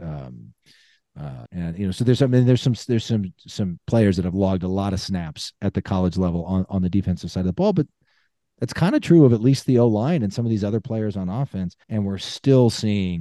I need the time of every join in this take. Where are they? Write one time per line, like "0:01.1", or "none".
0:01.5
0:11.8